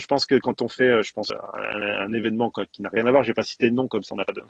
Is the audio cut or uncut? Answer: uncut